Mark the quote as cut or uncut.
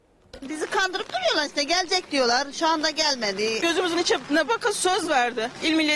cut